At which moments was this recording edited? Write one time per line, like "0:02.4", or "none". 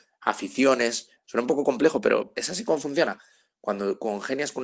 0:01.2
0:02.3